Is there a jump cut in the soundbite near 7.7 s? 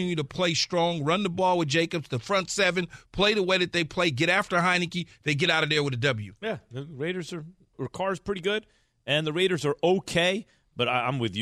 yes; 2 cuts; at 6.4 s, 7.7 s

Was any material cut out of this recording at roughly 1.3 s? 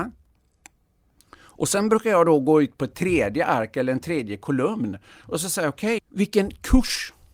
no; 1 cut; at 6.0 s

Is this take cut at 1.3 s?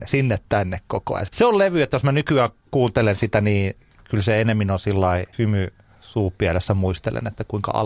yes; 2 cuts; at 1.3 s, 5.3 s

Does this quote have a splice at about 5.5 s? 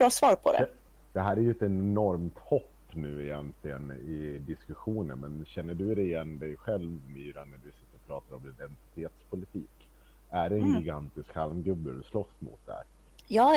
yes; 1 cut; at 5.5 s

